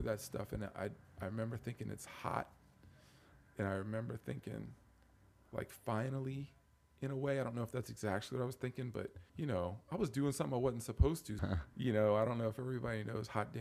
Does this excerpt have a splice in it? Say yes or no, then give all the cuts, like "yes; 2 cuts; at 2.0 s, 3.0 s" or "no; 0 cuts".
yes; 2 cuts; at 9.3 s, 11.4 s